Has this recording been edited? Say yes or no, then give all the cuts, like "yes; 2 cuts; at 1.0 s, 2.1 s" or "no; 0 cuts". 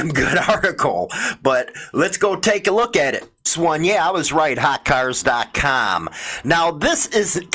no; 0 cuts